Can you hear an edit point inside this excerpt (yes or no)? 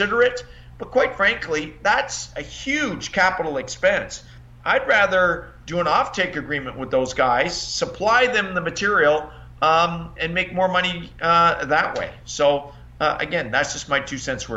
yes